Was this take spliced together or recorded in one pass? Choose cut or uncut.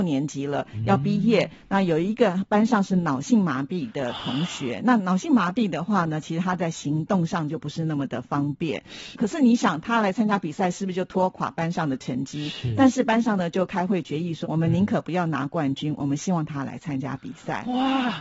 cut